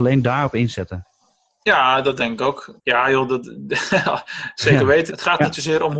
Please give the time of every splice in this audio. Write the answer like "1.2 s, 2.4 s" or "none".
2.8 s, 5.1 s